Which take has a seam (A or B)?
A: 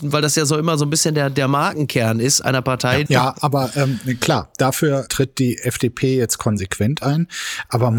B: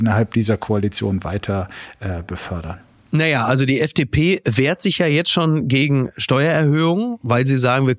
A